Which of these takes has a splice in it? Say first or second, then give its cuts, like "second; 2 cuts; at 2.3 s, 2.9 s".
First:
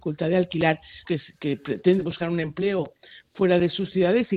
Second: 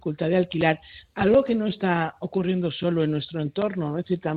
first; 1 cut; at 1.0 s